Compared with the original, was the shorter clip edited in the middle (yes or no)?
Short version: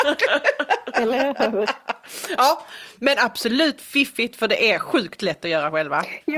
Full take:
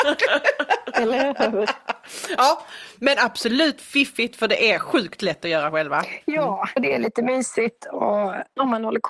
no